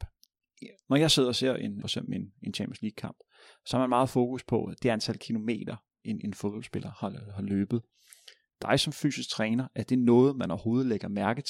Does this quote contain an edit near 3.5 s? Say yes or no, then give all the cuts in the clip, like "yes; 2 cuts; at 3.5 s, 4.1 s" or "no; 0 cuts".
no; 1 cut; at 1.8 s